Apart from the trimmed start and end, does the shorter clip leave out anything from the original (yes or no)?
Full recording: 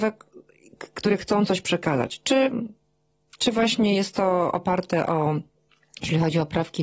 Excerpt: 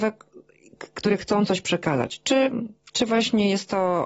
yes